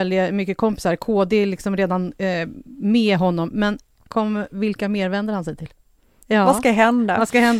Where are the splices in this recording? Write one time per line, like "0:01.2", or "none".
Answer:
0:06.2